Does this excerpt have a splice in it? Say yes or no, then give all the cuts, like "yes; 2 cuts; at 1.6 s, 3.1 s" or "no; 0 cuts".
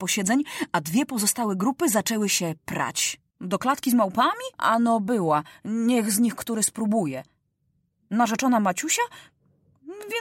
yes; 2 cuts; at 3.3 s, 4.5 s